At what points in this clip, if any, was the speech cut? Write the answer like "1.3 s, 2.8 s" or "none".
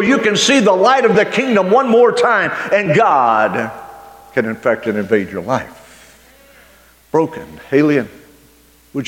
none